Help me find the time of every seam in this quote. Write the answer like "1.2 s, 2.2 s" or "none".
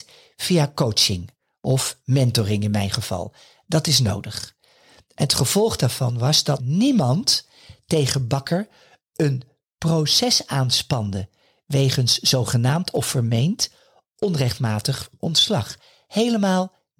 6.6 s